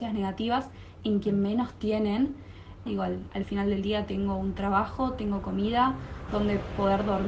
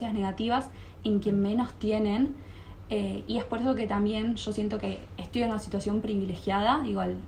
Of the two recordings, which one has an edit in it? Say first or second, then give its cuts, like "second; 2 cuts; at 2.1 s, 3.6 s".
first; 2 cuts; at 2.9 s, 6.3 s